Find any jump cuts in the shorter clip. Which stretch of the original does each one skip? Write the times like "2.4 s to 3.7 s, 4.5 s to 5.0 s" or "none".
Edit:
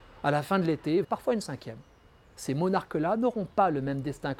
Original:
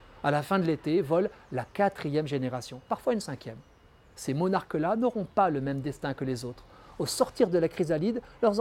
1.0 s to 2.8 s